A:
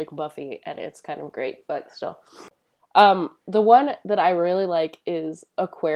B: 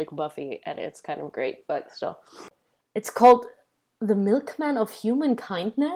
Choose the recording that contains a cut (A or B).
B